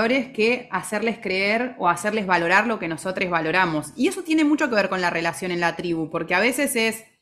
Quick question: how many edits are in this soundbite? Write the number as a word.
zero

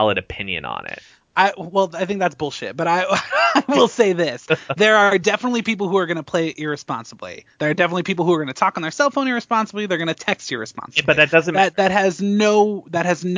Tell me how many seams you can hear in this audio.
zero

